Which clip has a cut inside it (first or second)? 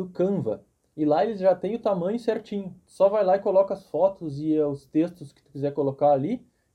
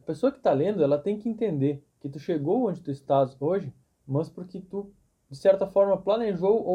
second